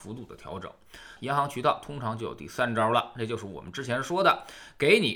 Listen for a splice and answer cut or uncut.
cut